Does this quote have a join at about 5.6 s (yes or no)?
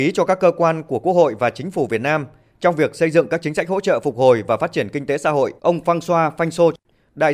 yes